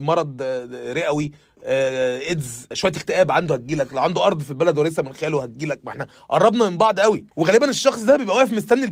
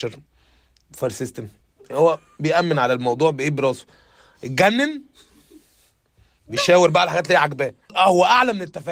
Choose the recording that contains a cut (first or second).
first